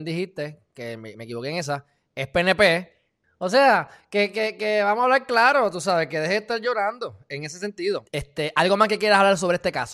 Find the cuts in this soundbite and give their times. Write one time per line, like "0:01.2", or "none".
0:03.2
0:08.1